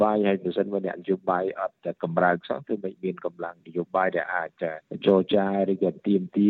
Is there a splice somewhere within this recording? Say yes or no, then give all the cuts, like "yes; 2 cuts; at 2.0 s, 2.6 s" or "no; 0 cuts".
no; 0 cuts